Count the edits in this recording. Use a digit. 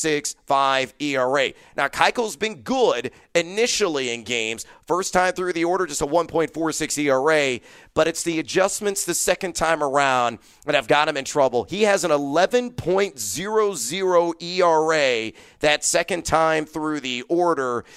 0